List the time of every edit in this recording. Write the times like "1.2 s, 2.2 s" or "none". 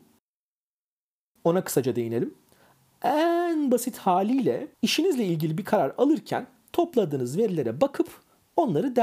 1.4 s, 4.7 s